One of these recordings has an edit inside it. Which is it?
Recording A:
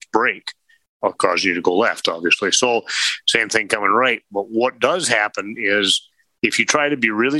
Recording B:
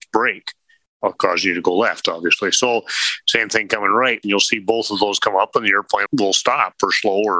B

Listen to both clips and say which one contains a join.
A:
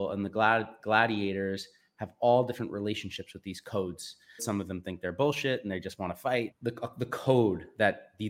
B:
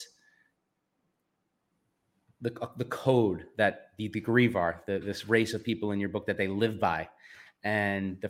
A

